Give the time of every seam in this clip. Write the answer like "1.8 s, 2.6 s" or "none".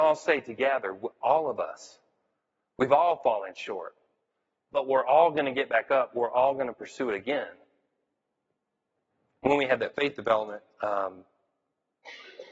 none